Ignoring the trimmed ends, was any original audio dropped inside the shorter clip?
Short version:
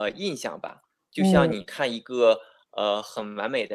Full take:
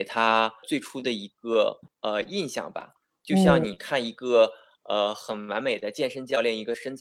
no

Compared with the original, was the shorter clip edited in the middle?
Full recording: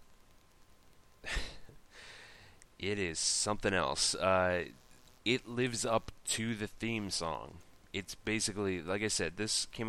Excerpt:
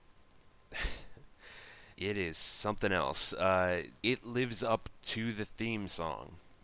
yes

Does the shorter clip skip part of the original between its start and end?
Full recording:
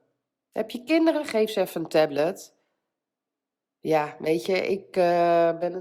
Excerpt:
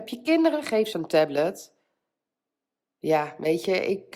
yes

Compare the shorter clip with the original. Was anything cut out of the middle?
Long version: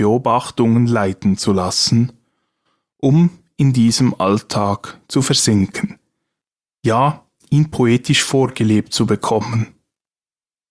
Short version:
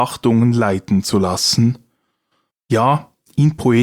yes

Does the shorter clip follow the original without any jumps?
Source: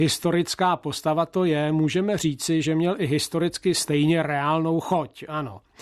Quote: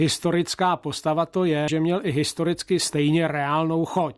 no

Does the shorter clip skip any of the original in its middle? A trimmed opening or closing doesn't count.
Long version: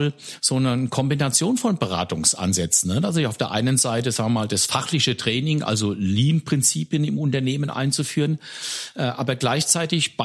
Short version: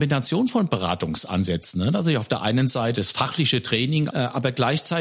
yes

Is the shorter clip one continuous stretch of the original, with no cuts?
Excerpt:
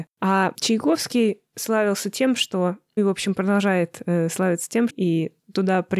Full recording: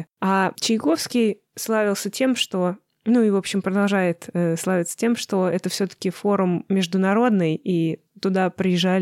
no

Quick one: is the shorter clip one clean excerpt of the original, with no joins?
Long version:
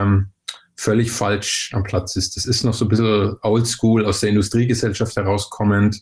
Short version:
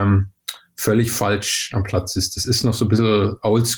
yes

